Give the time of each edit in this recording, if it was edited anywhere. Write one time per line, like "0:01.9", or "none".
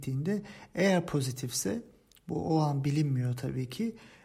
none